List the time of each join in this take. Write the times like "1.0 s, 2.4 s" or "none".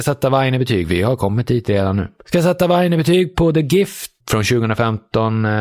4.2 s